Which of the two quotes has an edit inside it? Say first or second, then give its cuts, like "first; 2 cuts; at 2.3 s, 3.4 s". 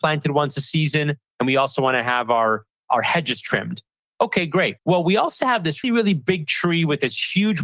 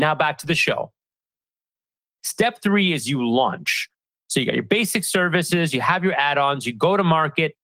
first; 2 cuts; at 4.8 s, 5.8 s